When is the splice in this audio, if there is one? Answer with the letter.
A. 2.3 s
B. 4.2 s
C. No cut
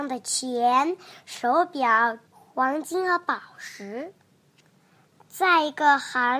A